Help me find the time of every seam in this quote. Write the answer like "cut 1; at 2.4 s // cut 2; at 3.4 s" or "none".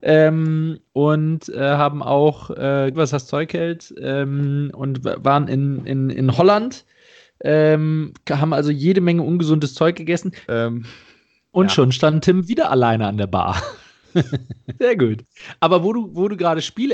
cut 1; at 2.9 s // cut 2; at 10.5 s // cut 3; at 14.8 s